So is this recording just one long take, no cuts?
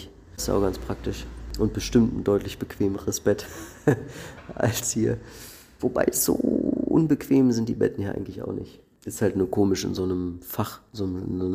yes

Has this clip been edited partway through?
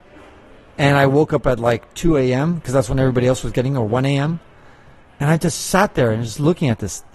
no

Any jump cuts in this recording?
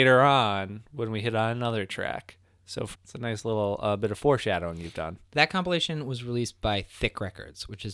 yes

